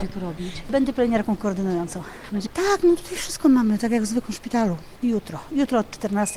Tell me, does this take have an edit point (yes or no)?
yes